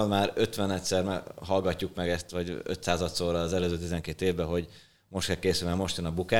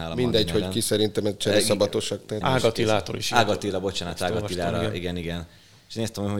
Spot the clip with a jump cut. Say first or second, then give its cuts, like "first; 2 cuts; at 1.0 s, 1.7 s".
second; 1 cut; at 2.4 s